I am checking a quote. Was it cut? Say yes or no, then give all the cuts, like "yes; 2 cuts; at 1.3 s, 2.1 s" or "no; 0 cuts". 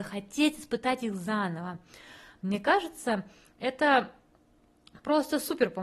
no; 0 cuts